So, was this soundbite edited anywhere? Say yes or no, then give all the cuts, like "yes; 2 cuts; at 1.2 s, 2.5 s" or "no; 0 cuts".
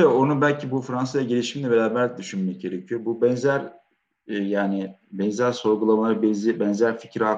no; 0 cuts